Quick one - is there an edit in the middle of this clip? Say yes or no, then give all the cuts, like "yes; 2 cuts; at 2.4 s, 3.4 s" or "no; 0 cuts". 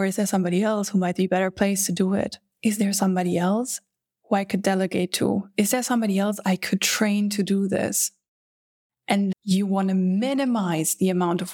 yes; 1 cut; at 9.3 s